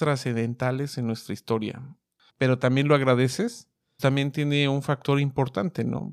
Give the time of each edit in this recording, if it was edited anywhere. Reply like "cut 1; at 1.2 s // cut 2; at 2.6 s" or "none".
cut 1; at 2.3 s // cut 2; at 4.0 s